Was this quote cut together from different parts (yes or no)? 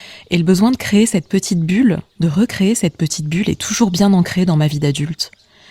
no